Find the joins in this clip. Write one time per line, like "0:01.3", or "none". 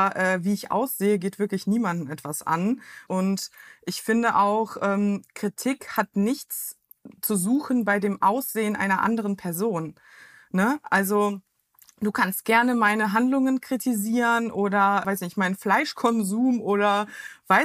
0:03.1
0:15.0